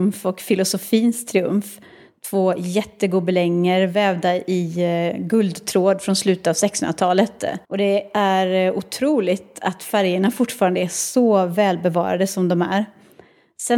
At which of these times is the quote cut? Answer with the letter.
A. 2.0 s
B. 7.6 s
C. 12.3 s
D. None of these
B